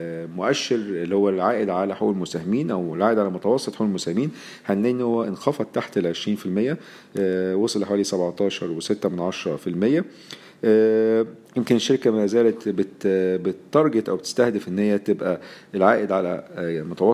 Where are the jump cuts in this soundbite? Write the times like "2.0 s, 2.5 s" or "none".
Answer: 11.4 s